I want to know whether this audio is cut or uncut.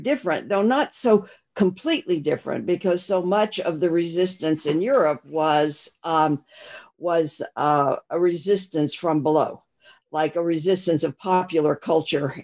uncut